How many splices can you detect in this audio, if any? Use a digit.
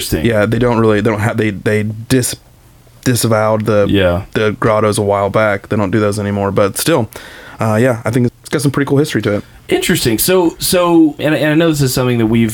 2